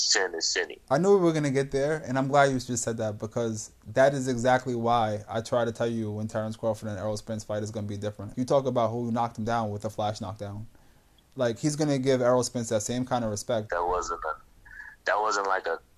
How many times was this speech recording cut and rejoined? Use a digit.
2